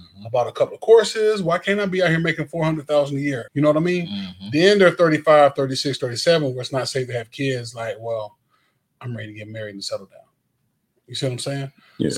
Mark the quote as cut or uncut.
cut